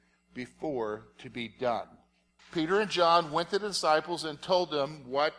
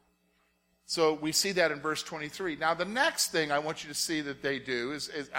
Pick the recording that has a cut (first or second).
first